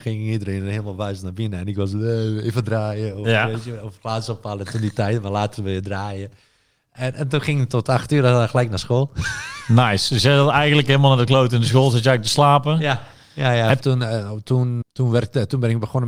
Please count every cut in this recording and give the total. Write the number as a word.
two